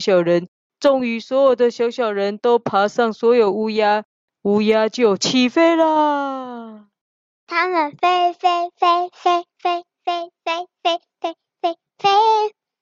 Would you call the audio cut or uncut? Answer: uncut